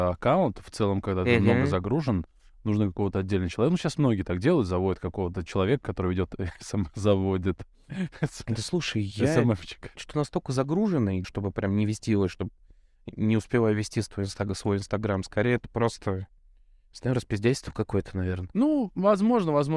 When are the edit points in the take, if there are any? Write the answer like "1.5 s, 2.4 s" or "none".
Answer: 10.0 s, 11.2 s